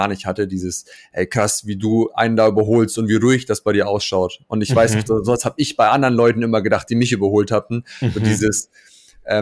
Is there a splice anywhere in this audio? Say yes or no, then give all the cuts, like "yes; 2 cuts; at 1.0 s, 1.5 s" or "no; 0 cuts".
no; 0 cuts